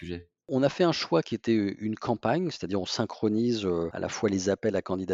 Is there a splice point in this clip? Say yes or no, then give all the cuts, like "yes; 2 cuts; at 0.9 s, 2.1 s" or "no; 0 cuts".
no; 0 cuts